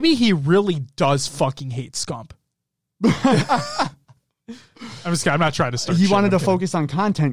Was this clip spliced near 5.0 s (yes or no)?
no